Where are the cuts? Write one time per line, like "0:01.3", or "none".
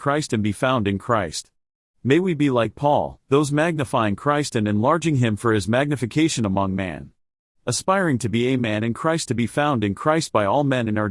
0:07.5